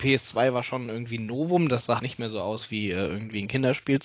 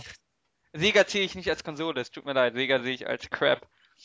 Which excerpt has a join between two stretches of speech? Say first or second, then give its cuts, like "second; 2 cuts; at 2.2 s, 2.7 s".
first; 1 cut; at 2.0 s